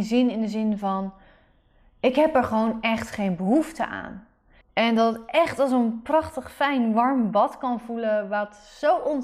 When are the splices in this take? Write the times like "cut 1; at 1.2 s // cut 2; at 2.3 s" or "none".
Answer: cut 1; at 4.6 s